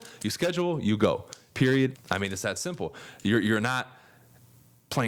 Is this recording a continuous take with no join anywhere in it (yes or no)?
no